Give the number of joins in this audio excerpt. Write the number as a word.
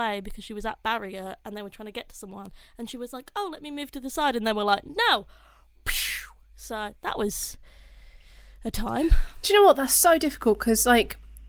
zero